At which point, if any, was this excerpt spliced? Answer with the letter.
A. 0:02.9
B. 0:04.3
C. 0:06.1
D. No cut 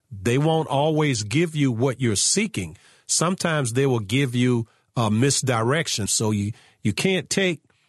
C